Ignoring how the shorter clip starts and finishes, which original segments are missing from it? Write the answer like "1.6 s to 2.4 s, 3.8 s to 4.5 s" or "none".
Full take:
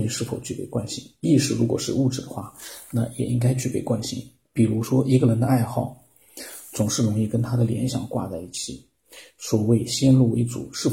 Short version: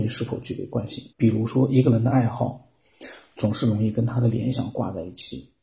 1.1 s to 4.5 s